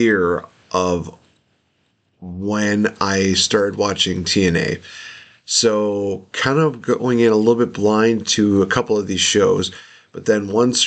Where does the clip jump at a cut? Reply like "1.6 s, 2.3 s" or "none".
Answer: none